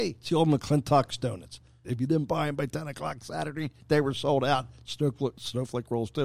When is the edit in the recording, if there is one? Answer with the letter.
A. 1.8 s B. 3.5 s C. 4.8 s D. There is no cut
A